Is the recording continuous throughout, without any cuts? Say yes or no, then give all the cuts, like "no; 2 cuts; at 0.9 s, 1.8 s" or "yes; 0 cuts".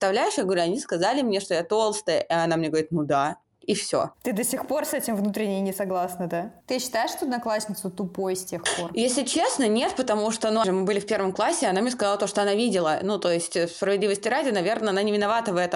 no; 2 cuts; at 6.6 s, 10.6 s